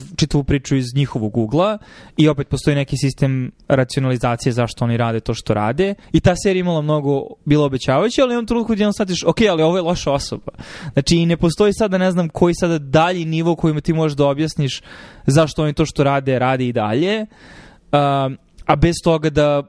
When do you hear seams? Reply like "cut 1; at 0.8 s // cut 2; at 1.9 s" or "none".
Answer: cut 1; at 6.0 s

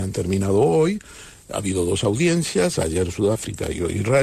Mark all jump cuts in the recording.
none

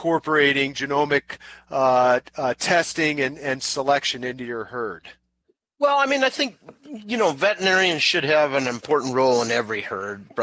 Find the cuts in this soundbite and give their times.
none

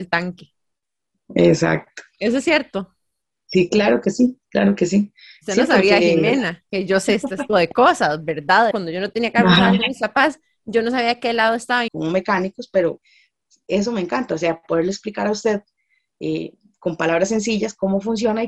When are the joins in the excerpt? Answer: cut 1; at 7.5 s // cut 2; at 8.7 s // cut 3; at 11.9 s

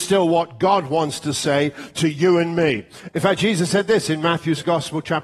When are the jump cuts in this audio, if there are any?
cut 1; at 3.1 s

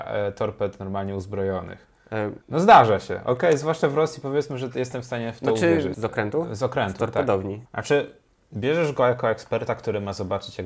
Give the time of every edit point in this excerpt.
cut 1; at 2.4 s // cut 2; at 5.9 s // cut 3; at 7.7 s

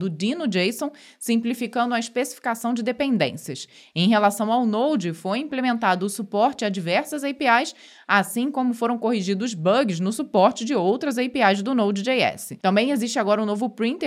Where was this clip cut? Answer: none

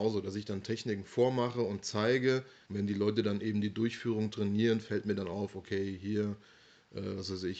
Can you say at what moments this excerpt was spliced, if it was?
cut 1; at 2.6 s

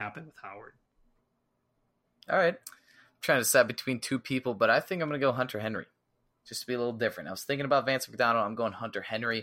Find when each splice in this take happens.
cut 1; at 2.6 s

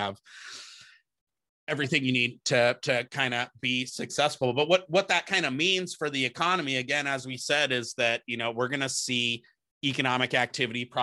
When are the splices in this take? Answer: none

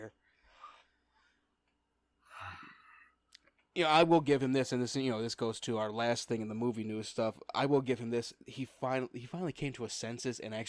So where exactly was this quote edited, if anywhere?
none

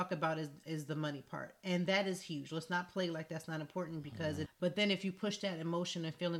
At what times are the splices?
cut 1; at 4.5 s

